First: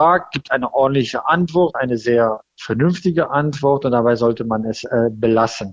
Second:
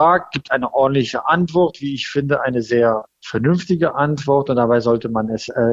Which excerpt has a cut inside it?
first; 1 cut; at 1.7 s

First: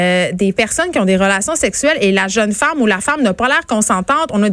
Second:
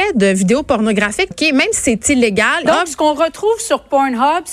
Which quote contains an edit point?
second; 2 cuts; at 1.3 s, 2.7 s

